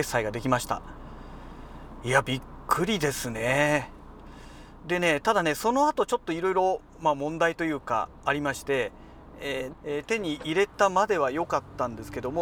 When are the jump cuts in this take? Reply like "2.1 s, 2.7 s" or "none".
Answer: 9.7 s